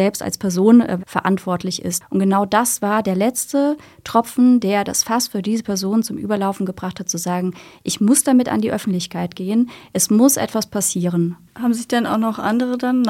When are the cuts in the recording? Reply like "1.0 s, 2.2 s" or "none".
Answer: 1.0 s